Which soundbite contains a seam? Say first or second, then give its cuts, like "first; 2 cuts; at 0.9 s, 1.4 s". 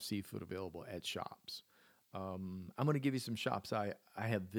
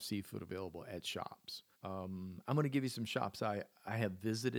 second; 1 cut; at 1.7 s